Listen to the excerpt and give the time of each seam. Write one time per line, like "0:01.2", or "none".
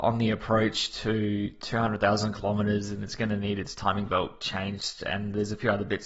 none